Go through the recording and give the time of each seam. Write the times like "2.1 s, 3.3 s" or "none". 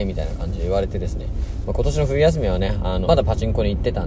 1.6 s, 3.0 s